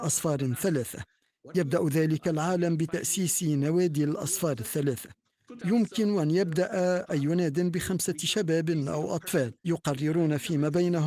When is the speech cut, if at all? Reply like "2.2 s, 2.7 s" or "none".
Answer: 9.6 s